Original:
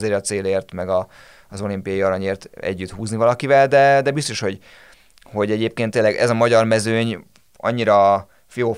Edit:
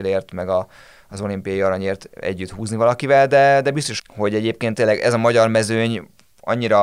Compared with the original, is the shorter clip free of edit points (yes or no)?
no